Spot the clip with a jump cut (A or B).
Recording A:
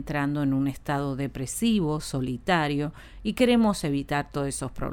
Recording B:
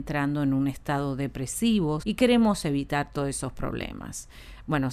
B